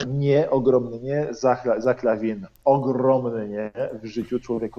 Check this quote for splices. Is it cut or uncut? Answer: uncut